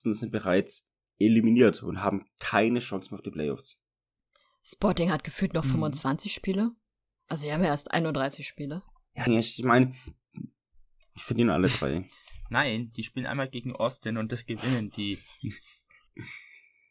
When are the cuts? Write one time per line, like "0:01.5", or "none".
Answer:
0:09.3